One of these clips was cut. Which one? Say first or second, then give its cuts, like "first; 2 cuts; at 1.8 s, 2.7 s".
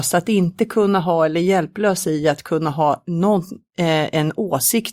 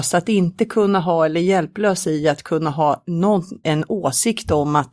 second; 1 cut; at 3.6 s